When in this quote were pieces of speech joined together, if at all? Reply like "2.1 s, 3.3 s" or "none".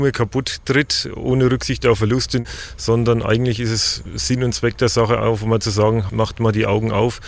6.1 s